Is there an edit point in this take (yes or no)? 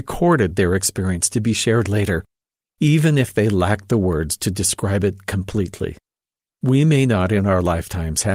no